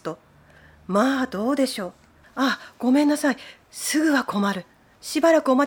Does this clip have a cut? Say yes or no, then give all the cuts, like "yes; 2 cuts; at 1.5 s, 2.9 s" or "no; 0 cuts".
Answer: yes; 1 cut; at 2.2 s